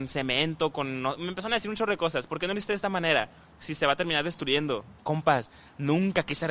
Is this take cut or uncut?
cut